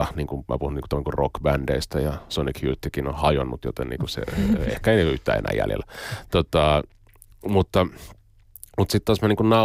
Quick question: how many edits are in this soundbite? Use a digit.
0